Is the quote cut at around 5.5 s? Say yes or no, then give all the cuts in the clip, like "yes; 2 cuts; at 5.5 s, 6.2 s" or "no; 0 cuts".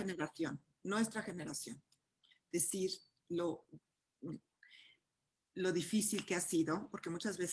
no; 1 cut; at 2.3 s